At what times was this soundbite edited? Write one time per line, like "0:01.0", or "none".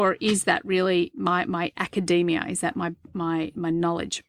none